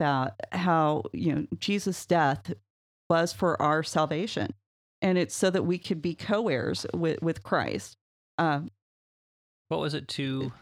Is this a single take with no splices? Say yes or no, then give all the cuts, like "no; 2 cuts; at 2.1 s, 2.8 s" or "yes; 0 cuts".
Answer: no; 1 cut; at 9.7 s